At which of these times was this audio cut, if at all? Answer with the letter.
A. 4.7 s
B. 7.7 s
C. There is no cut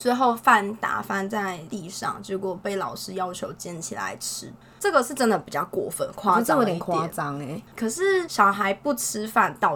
C